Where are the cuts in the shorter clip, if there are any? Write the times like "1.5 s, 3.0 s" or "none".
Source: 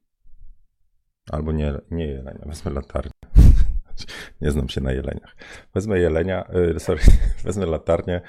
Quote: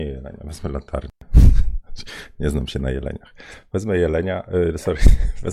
none